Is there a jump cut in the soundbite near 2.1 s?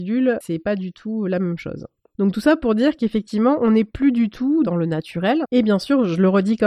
no; 1 cut; at 5.4 s

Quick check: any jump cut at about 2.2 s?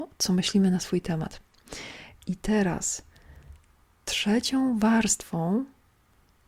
yes; 1 cut; at 2.2 s

